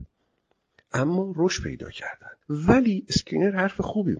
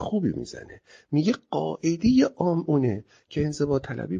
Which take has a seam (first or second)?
first